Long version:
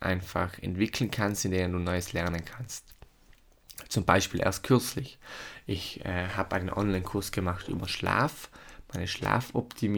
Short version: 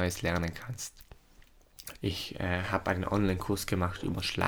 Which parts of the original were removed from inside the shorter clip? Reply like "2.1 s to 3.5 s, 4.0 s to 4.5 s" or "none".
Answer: 3.9 s to 5.6 s